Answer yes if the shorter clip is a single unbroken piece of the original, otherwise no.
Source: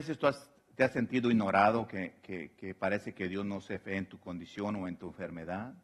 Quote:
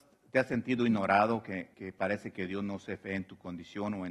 no